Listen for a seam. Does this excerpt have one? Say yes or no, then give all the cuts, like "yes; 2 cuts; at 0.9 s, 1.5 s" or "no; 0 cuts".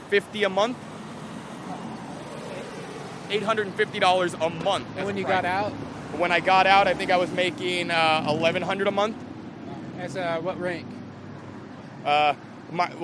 no; 0 cuts